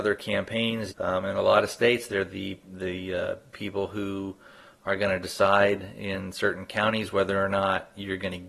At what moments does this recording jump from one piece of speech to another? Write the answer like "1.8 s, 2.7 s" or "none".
0.9 s